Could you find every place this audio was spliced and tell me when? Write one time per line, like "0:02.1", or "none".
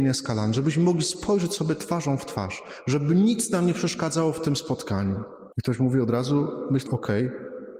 0:05.5
0:06.9